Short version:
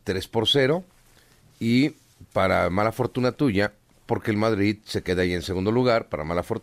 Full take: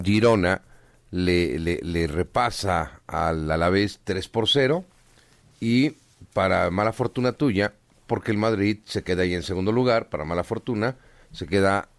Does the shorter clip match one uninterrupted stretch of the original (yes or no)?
yes